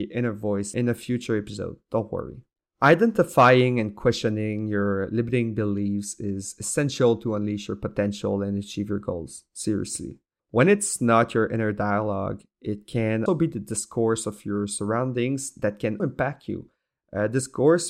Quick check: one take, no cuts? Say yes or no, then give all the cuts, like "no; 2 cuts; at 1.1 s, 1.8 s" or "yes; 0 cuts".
no; 2 cuts; at 13.3 s, 16.0 s